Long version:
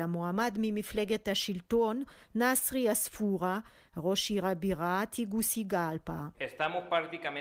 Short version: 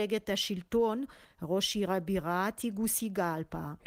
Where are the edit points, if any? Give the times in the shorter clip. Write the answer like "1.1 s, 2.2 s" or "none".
1.3 s